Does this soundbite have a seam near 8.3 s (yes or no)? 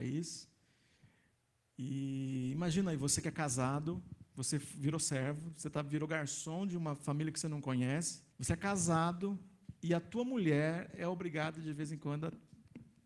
yes